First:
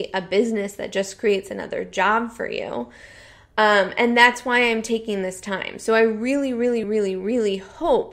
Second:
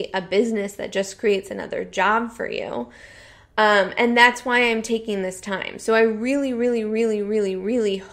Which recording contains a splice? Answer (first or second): first